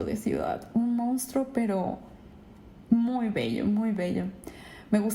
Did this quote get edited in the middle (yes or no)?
yes